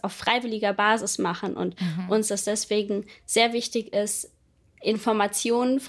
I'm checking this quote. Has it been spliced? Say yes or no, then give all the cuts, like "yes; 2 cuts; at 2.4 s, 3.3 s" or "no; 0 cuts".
no; 0 cuts